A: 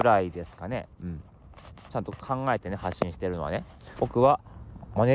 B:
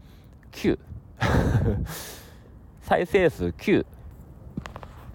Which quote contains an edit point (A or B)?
A